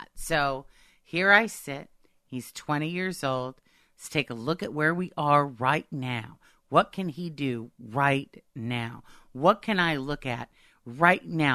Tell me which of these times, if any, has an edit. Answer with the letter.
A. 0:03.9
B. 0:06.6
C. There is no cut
C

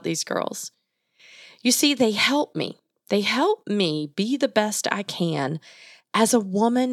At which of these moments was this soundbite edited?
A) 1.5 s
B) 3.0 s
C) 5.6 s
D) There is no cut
D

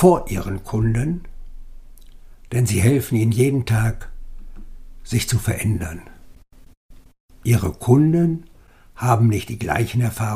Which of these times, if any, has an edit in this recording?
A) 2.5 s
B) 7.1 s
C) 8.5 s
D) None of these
D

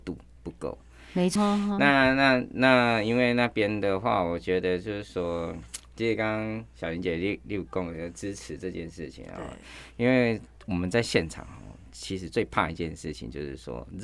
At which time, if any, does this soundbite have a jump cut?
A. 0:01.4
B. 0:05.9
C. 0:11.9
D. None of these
A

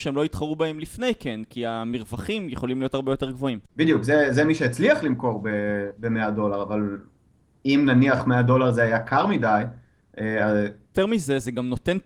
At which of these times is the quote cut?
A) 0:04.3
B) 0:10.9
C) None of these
B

